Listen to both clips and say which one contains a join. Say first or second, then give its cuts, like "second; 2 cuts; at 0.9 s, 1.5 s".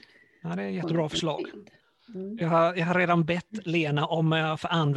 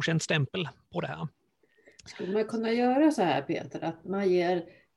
second; 1 cut; at 4.0 s